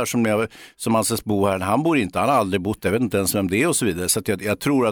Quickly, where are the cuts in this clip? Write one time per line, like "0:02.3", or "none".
none